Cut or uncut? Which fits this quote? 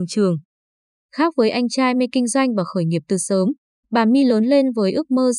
uncut